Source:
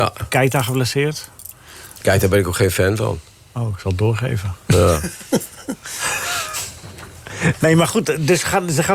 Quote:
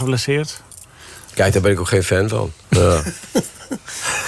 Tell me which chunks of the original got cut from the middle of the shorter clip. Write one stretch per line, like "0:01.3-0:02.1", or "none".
0:03.3-0:04.6